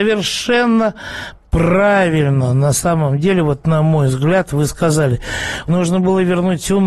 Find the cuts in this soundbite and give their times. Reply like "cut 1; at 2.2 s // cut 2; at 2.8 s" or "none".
cut 1; at 5.7 s